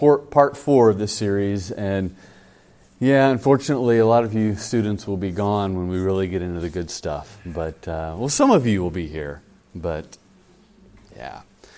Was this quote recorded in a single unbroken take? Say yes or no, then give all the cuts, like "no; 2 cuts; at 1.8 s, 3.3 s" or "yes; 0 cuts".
yes; 0 cuts